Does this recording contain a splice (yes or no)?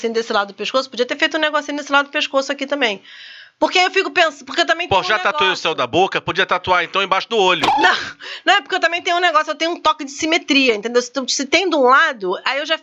no